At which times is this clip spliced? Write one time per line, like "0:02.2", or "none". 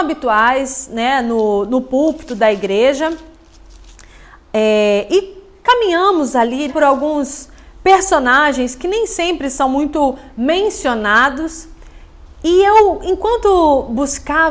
0:06.7